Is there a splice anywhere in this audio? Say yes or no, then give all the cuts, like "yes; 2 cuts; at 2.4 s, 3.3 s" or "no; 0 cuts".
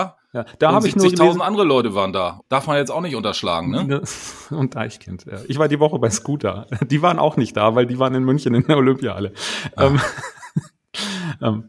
yes; 1 cut; at 2.4 s